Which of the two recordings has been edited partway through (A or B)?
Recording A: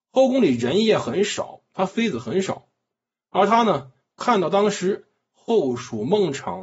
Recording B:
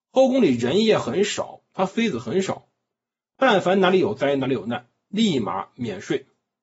B